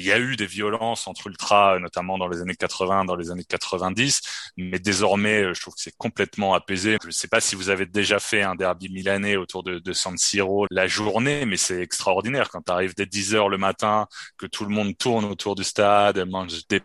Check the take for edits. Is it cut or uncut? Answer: cut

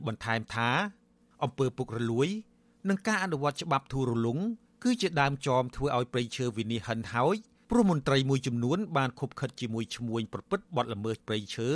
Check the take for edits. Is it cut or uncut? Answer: uncut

